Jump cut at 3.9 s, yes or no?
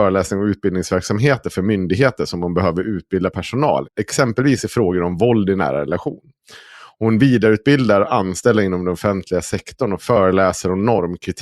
yes